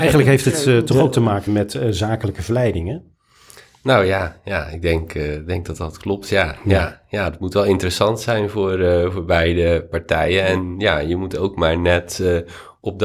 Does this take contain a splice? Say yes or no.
yes